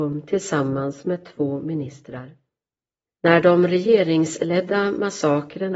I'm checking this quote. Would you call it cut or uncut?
cut